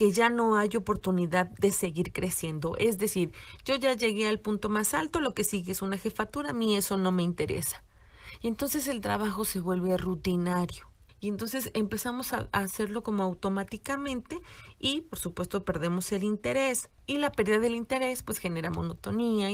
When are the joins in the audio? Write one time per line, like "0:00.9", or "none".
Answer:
none